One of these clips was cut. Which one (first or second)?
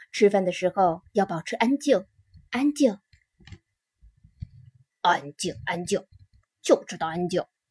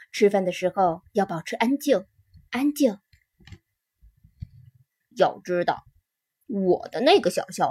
second